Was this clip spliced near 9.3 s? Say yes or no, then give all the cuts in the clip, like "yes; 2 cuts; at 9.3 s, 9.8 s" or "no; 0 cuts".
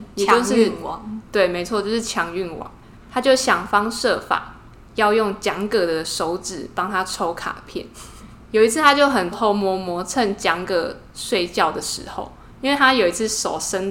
yes; 1 cut; at 9.3 s